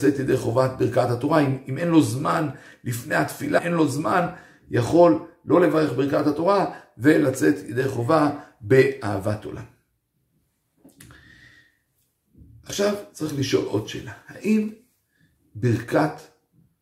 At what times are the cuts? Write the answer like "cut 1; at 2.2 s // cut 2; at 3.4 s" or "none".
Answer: cut 1; at 3.6 s